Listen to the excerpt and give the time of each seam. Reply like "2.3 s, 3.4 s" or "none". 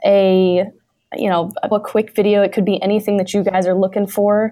1.7 s